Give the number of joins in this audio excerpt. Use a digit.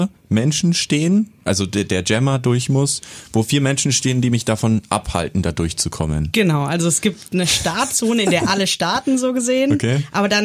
0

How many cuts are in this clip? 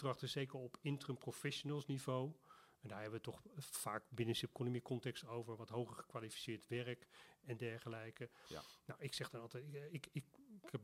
0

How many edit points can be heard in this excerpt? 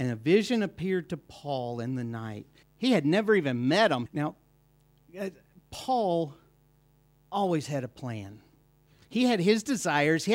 2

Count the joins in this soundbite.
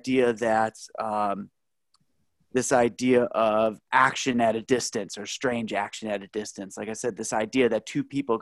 0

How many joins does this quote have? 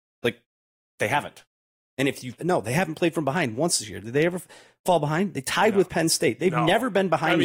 1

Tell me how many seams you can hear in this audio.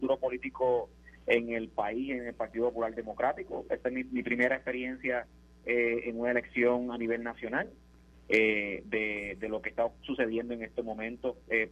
1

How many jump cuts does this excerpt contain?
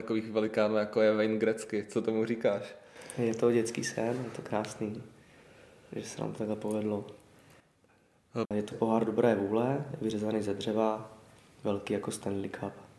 1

